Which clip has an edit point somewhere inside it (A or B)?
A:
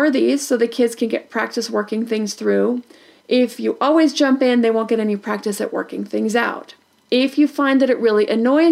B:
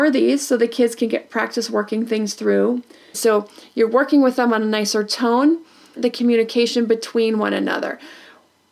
B